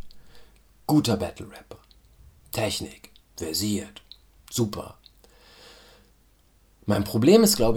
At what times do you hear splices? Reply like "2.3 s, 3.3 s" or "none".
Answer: none